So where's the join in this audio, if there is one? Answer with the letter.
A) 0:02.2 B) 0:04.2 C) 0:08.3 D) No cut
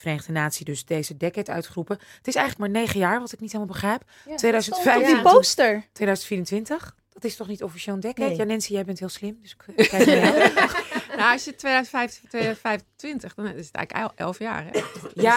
D